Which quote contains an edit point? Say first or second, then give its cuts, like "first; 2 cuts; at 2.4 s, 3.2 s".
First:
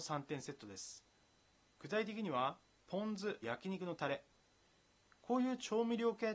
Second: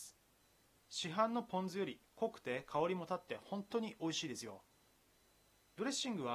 first; 1 cut; at 3.4 s